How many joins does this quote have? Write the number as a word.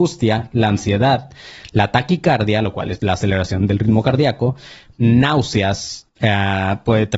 three